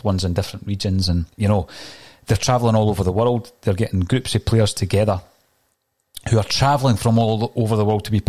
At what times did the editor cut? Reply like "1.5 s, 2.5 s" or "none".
1.3 s